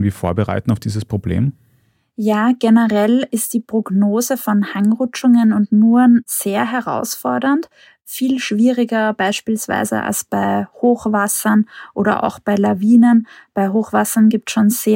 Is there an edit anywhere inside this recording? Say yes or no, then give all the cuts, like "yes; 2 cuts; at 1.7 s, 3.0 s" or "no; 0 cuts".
no; 0 cuts